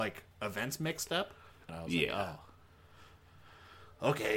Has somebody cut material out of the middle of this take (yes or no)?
yes